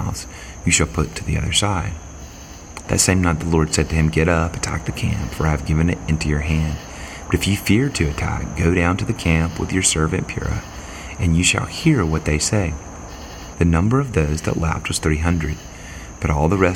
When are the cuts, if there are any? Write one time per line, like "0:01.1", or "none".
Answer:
0:02.8
0:13.5